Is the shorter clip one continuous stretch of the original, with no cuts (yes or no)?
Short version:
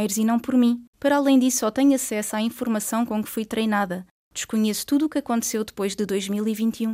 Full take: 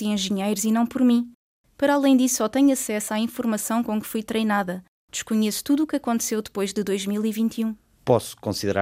no